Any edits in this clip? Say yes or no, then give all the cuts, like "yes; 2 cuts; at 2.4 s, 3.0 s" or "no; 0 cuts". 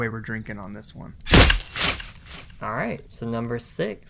no; 0 cuts